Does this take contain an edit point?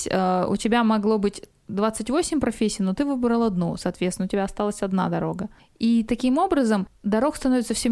no; 0 cuts

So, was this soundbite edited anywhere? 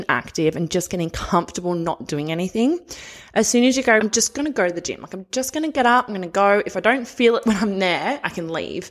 yes; 1 cut; at 4.0 s

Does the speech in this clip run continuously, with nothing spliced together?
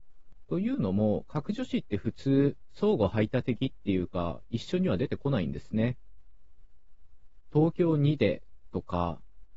yes; 0 cuts

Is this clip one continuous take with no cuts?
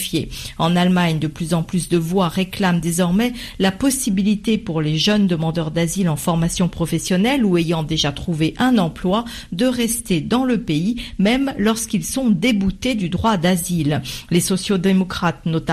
yes; 0 cuts

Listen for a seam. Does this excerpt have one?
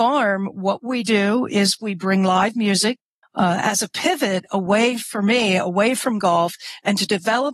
yes; 1 cut; at 3.2 s

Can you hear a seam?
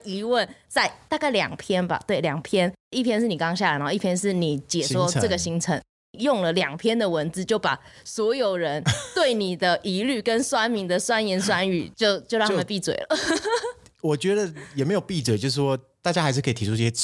no; 0 cuts

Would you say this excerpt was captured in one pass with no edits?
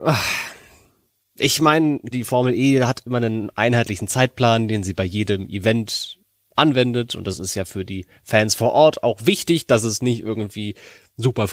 no; 1 cut; at 2.1 s

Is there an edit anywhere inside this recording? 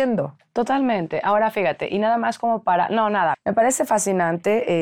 yes; 1 cut; at 3.3 s

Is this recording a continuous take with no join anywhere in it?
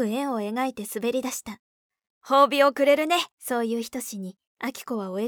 no; 2 cuts; at 2.1 s, 3.3 s

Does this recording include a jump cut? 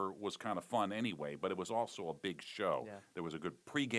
no; 0 cuts

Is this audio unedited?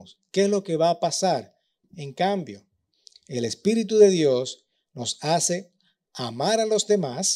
no; 1 cut; at 1.8 s

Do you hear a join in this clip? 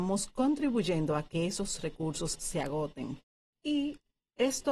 no; 0 cuts

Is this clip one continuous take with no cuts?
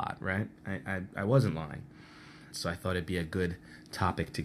no; 1 cut; at 2.5 s

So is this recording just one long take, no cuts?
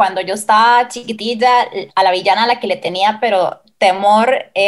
no; 1 cut; at 1.9 s

